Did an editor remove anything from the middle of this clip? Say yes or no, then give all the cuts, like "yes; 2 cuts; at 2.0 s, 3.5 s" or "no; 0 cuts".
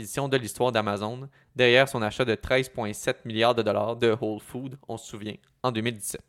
no; 0 cuts